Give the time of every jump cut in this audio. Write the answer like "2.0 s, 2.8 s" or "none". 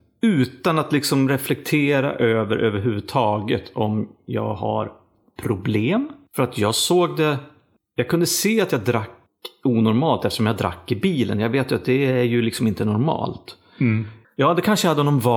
14.2 s